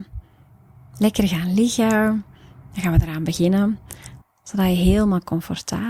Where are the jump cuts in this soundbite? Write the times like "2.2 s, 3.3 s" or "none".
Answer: 4.2 s

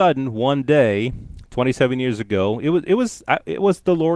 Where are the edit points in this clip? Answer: none

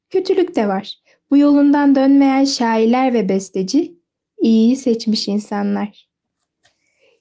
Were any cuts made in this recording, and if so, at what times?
none

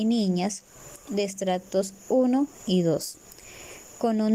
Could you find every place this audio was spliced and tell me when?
none

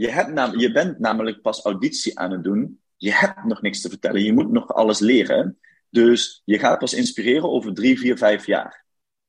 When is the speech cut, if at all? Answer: none

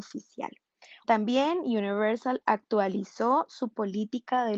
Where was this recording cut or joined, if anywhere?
1.0 s

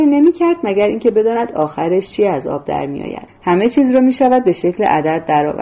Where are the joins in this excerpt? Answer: 3.3 s

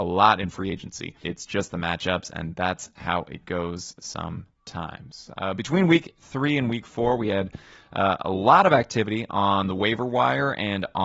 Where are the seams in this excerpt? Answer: 1.2 s

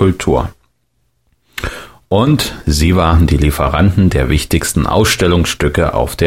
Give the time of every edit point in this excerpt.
none

